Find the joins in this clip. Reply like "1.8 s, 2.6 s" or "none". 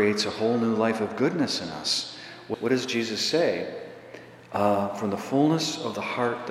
2.5 s